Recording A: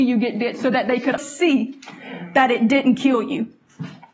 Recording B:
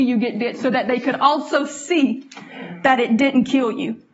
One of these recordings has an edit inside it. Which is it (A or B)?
A